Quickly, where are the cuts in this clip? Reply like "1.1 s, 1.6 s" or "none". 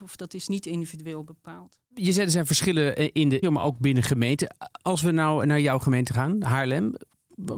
3.4 s